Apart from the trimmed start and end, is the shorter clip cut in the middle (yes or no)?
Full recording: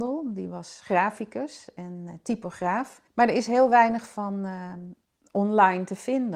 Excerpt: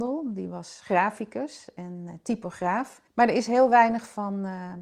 no